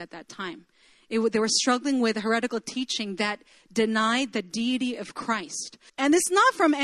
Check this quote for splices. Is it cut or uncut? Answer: cut